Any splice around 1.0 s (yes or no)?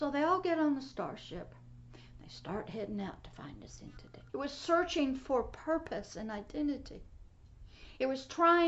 no